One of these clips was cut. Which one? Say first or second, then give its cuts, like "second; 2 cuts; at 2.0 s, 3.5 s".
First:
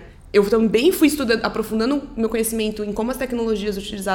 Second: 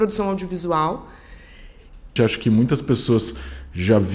second; 1 cut; at 2.2 s